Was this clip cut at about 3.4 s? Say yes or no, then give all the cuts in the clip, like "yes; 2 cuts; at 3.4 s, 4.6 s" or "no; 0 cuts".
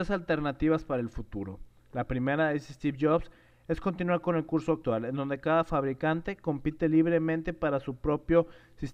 no; 0 cuts